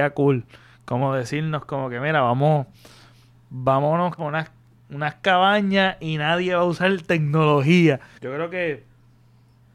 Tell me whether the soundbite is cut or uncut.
cut